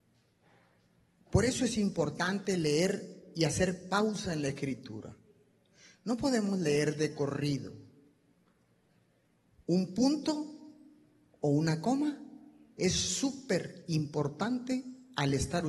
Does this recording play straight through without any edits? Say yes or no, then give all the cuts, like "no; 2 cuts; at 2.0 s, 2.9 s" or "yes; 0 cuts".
yes; 0 cuts